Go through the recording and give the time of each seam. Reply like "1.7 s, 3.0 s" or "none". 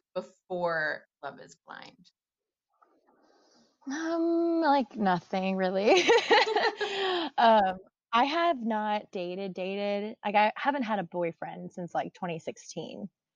9.1 s